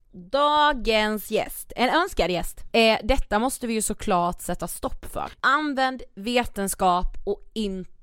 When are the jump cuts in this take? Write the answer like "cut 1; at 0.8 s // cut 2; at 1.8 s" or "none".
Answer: cut 1; at 2.7 s // cut 2; at 5.4 s